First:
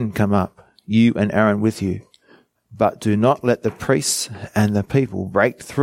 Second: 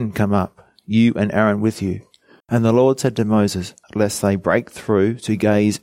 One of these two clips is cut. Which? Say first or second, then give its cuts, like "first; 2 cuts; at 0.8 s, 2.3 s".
second; 2 cuts; at 2.4 s, 3.8 s